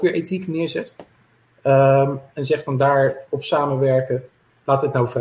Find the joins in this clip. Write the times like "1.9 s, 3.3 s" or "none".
none